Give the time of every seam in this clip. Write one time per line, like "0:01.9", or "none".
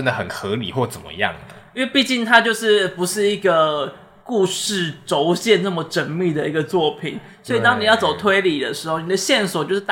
none